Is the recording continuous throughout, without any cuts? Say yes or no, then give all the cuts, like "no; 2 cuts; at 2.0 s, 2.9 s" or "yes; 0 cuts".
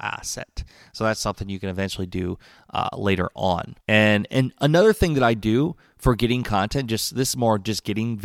no; 1 cut; at 3.8 s